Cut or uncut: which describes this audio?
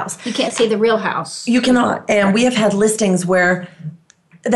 uncut